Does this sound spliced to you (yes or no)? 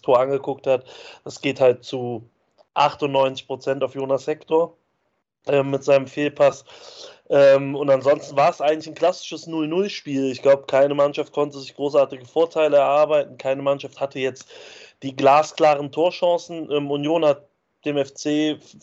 no